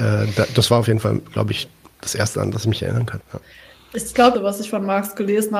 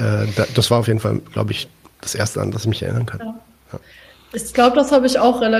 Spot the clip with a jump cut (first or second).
first